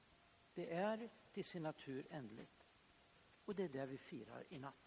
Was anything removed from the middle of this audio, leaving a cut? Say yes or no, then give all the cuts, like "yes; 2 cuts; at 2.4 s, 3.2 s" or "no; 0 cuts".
yes; 1 cut; at 3.4 s